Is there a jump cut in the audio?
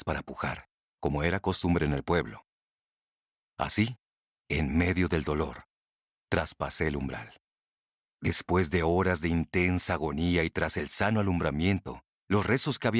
no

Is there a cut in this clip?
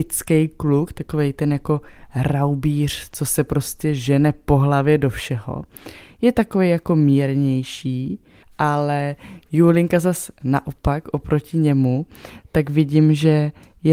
no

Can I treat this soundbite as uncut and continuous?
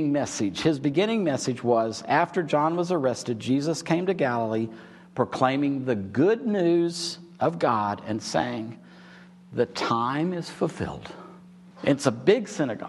no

